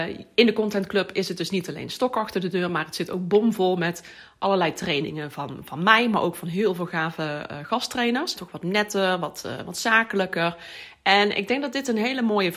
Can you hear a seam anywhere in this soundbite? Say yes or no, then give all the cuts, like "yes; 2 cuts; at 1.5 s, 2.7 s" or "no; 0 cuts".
yes; 1 cut; at 8.4 s